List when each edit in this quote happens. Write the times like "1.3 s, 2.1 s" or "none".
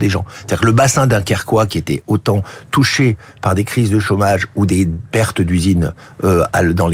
none